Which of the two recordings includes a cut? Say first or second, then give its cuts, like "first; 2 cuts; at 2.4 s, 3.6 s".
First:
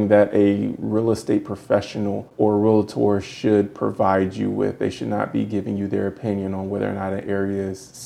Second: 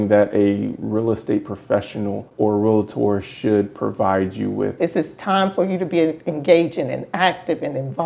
second; 1 cut; at 4.8 s